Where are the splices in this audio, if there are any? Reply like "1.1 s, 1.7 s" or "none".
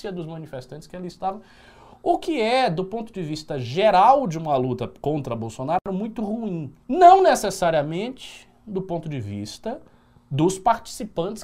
6.8 s